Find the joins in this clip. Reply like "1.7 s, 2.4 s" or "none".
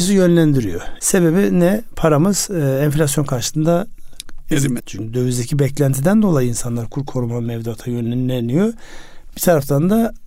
1.0 s, 4.8 s